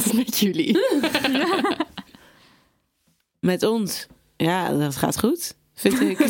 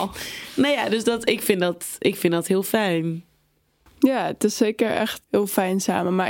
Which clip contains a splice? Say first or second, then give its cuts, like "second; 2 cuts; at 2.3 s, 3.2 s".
second; 1 cut; at 5.2 s